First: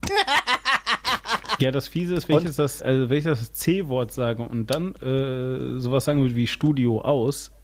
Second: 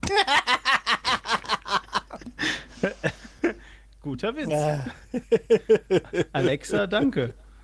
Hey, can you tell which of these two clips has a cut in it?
first; 2 cuts; at 1.6 s, 2.8 s

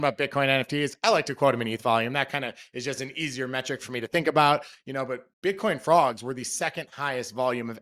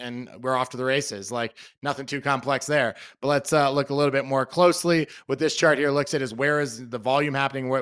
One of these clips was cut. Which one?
first; 1 cut; at 5.3 s

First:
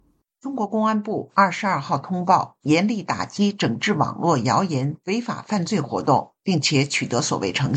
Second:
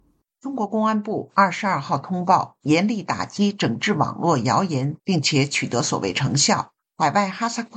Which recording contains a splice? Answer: second; 1 cut; at 5.0 s

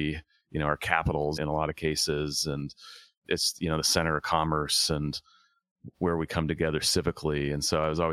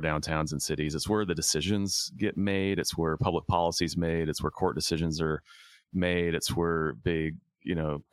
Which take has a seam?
first; 2 cuts; at 1.4 s, 3.2 s

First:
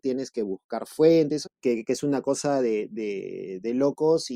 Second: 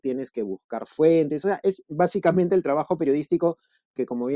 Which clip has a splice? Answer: first; 1 cut; at 1.4 s

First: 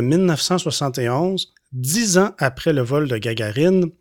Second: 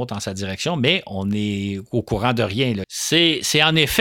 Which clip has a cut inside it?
second; 1 cut; at 2.8 s

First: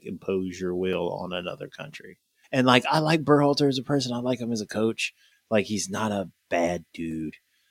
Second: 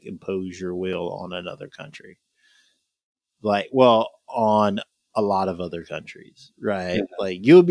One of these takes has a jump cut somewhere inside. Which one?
first; 2 cuts; at 2.4 s, 5.3 s

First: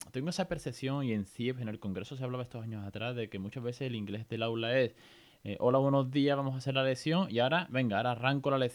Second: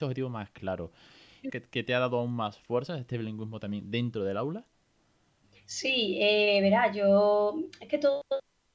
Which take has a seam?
second; 1 cut; at 1.5 s

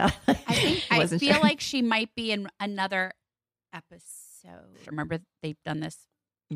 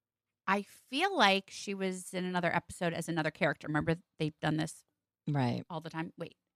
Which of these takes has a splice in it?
first; 1 cut; at 4.8 s

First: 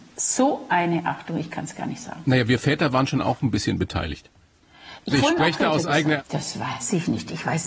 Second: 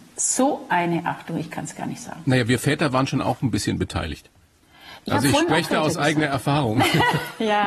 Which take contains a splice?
first; 2 cuts; at 5.1 s, 6.2 s

